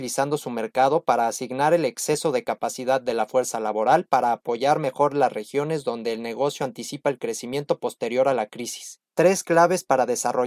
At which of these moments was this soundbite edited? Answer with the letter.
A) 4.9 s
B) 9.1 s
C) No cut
B